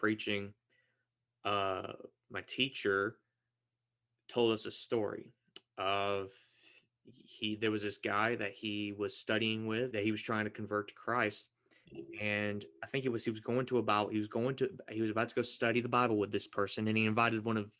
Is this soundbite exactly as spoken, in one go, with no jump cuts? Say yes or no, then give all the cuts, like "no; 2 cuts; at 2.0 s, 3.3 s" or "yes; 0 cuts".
no; 1 cut; at 9.9 s